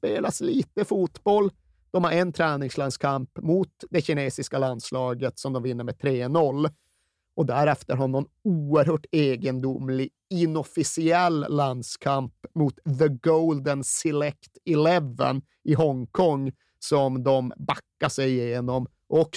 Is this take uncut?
yes; 0 cuts

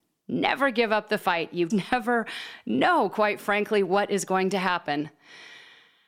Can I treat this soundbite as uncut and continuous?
no; 1 cut; at 1.7 s

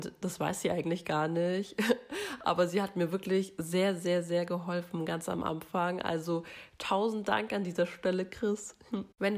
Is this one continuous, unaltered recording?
yes; 0 cuts

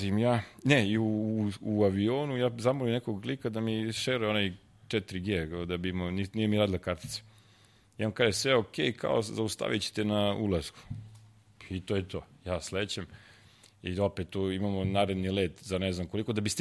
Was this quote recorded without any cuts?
yes; 0 cuts

